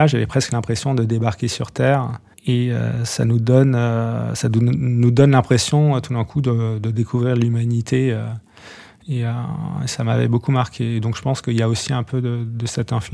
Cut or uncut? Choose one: cut